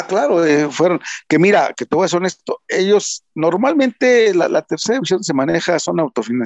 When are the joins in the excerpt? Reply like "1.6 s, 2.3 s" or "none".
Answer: none

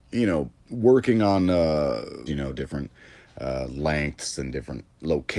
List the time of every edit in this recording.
2.3 s

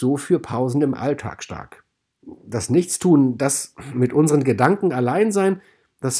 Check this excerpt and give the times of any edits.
2.2 s

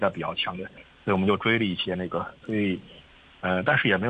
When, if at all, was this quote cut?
2.4 s

